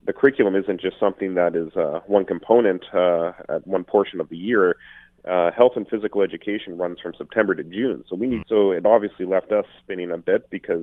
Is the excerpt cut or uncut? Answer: cut